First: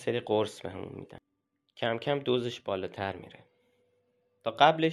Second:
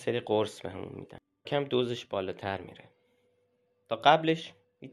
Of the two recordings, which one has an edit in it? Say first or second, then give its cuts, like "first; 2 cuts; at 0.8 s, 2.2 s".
second; 1 cut; at 1.4 s